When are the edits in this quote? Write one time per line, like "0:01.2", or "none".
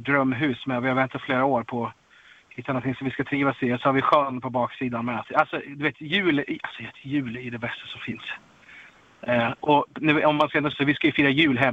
0:05.2
0:10.7